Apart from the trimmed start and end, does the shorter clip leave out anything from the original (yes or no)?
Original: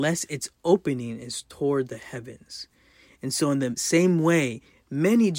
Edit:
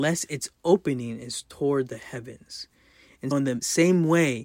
yes